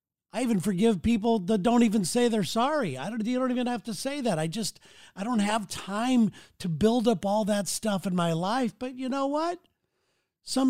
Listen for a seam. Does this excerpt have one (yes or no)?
no